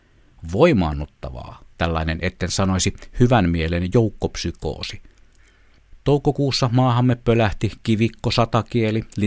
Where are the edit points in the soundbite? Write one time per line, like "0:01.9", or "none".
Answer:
0:01.8